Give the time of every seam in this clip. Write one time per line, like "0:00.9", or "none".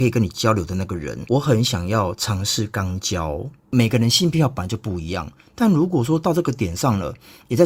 0:01.3